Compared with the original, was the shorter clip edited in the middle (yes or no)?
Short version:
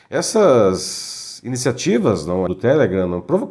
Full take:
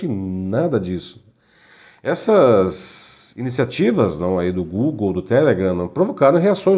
yes